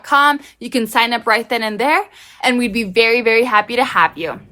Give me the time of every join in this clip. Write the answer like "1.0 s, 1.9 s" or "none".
none